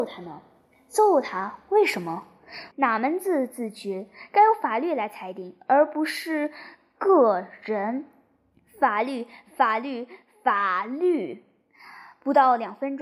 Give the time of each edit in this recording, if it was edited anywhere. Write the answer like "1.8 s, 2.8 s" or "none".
2.7 s

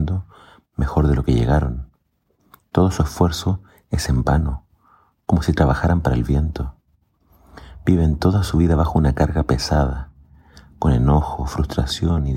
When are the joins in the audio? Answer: none

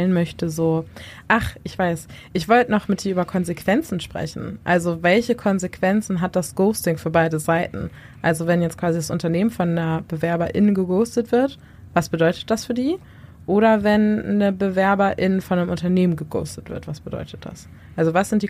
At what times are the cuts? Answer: none

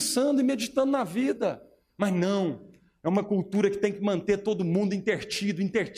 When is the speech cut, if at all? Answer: none

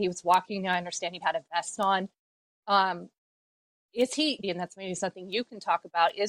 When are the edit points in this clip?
1.2 s, 4.4 s

